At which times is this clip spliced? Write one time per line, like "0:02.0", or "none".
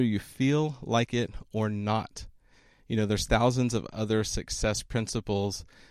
none